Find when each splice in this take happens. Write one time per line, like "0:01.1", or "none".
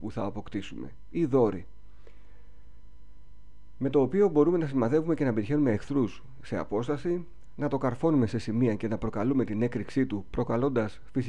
none